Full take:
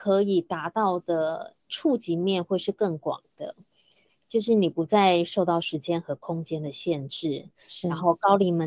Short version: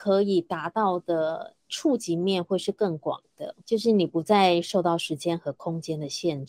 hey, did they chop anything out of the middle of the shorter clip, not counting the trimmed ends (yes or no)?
yes